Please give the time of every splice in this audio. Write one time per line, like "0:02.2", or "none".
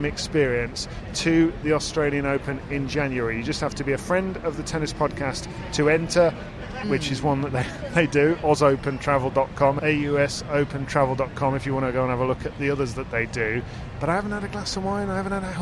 0:06.8